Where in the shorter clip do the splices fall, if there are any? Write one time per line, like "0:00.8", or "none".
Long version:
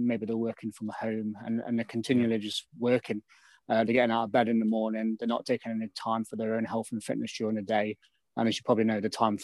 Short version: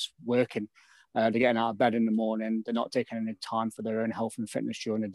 none